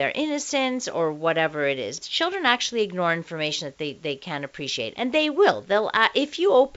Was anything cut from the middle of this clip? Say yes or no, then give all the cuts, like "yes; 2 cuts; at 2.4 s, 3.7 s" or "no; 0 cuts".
yes; 2 cuts; at 2.0 s, 4.9 s